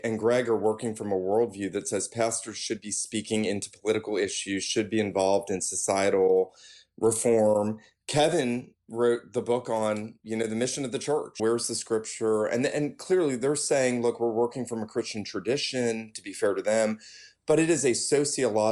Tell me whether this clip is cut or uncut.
cut